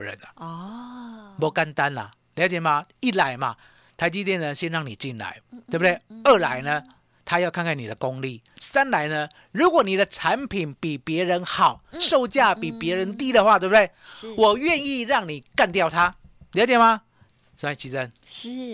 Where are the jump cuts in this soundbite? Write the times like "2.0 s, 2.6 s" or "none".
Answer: none